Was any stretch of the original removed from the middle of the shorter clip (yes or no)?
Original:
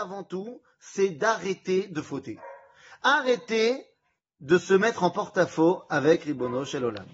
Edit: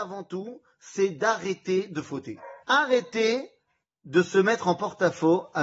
yes